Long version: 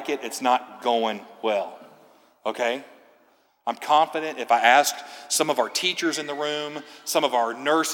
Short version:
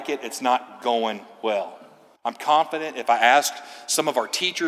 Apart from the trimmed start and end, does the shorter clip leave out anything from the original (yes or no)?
yes